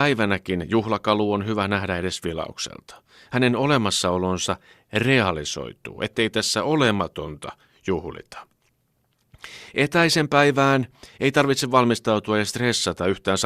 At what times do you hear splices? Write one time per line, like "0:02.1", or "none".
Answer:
none